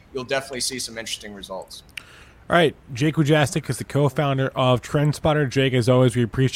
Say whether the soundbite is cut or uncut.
uncut